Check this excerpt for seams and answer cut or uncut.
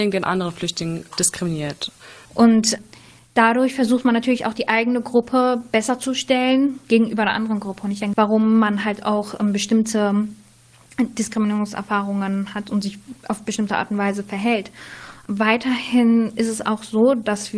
cut